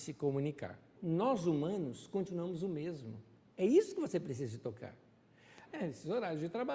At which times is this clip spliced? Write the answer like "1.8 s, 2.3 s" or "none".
1.0 s, 5.7 s